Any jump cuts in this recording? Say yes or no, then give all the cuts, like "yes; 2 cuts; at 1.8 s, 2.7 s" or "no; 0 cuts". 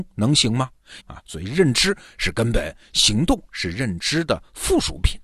yes; 1 cut; at 1.0 s